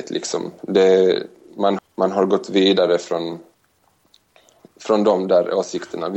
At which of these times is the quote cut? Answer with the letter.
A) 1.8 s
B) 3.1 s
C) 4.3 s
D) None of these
A